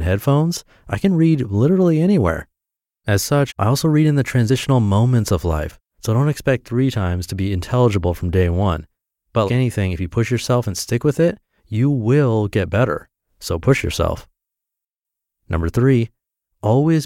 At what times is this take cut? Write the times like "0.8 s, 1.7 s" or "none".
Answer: 3.5 s, 5.9 s, 9.5 s